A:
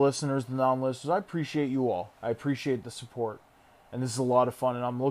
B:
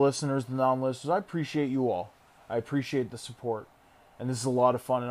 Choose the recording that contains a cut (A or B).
A